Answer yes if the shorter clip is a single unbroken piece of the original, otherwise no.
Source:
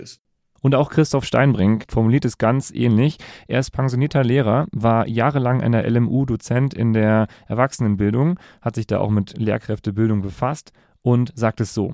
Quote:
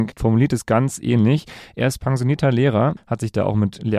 no